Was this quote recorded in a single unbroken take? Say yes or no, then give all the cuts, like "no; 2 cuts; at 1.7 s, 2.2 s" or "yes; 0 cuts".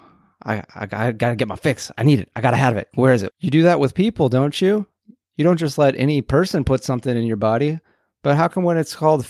no; 1 cut; at 3.3 s